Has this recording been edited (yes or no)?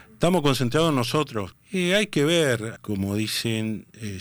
yes